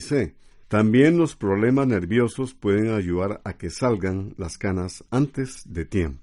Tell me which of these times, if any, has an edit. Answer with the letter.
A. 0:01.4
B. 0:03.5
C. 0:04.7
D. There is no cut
D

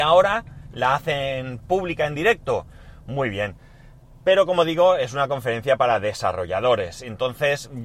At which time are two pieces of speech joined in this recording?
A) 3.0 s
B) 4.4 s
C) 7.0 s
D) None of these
D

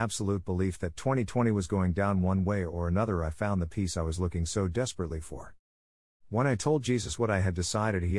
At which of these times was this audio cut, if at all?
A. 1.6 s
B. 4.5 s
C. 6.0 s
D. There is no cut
D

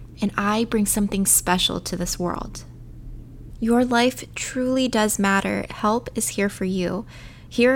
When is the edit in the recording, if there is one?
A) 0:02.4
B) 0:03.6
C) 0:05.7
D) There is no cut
C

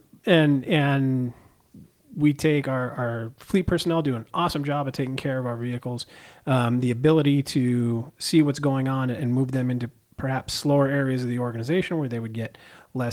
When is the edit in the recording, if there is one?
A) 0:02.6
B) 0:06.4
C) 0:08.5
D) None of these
D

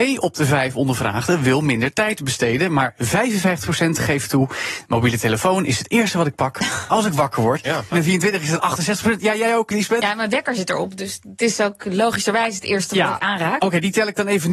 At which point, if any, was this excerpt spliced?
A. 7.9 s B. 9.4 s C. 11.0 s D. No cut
A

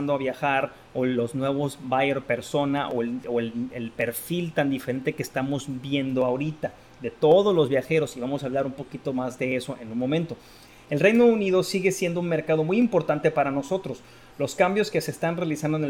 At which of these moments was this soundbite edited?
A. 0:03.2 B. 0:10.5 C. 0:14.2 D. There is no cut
D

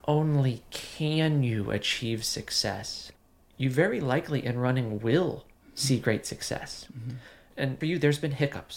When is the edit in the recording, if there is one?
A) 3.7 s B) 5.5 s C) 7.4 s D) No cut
B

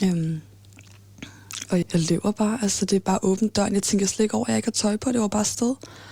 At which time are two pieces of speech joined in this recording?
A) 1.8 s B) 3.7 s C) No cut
A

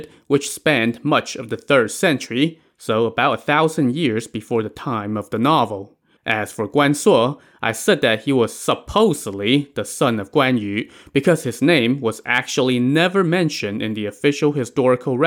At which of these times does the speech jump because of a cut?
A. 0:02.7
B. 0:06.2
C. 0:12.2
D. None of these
B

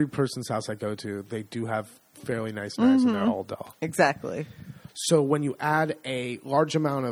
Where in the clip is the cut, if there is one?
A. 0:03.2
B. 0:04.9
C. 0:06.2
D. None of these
B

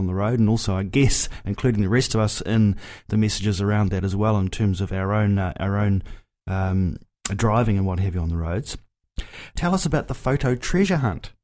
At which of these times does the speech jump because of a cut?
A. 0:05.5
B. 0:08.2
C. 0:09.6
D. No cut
C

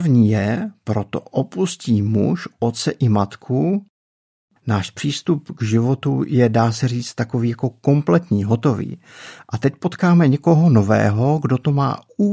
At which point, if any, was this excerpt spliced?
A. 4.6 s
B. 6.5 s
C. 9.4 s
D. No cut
A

